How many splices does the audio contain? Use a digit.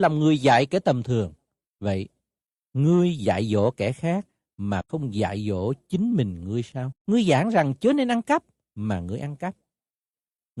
2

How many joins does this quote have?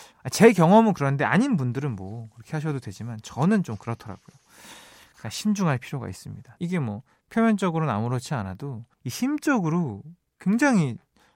2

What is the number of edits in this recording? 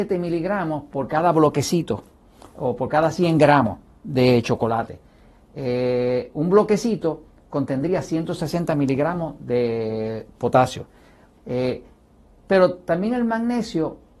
1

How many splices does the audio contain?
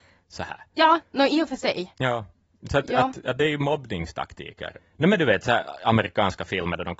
1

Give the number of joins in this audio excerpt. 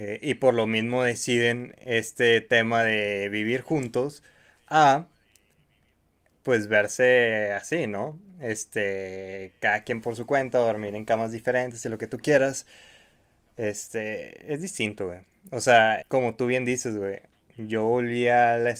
1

